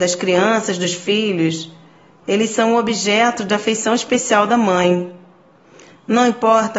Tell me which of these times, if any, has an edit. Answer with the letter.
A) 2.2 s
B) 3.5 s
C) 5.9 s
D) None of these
A